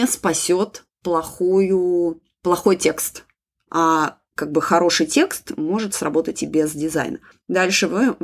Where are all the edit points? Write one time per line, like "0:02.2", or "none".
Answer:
0:07.3